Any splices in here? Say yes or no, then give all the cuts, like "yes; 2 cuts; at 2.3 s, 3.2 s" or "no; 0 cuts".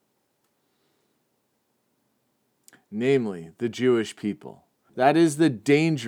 yes; 1 cut; at 4.9 s